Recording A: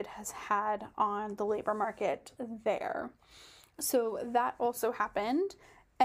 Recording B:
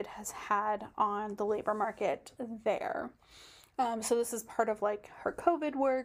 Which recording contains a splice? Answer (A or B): A